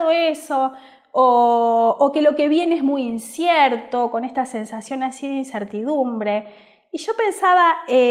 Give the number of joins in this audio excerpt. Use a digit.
0